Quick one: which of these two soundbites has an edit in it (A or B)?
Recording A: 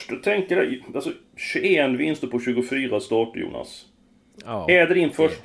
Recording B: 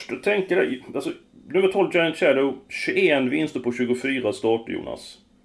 A